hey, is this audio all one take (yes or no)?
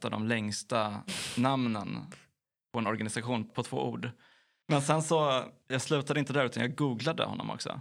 no